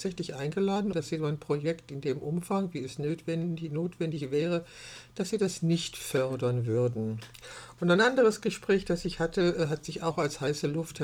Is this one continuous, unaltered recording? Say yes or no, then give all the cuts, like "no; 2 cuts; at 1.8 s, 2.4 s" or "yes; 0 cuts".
no; 1 cut; at 0.9 s